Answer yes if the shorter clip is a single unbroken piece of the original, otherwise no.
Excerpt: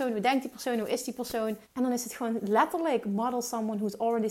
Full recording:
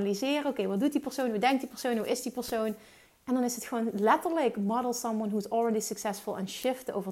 no